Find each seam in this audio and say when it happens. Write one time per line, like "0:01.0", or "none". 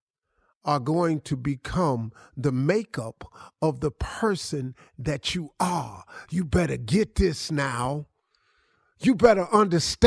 none